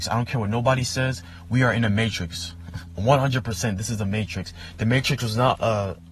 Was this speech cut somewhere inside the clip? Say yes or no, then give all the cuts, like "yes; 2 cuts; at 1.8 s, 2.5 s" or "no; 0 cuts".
no; 0 cuts